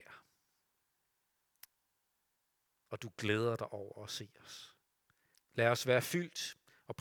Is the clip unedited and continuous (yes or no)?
no